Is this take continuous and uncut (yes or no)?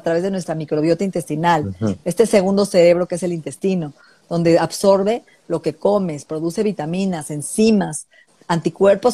yes